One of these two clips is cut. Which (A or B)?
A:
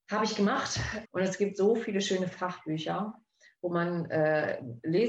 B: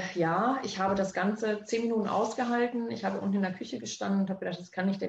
A